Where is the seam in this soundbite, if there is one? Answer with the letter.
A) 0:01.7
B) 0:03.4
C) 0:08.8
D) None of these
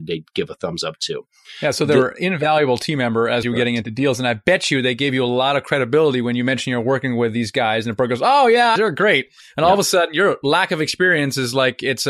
C